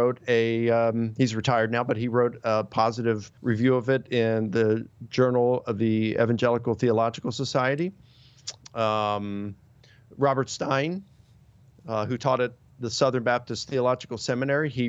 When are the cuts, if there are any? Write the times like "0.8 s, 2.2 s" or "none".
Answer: 3.4 s, 8.6 s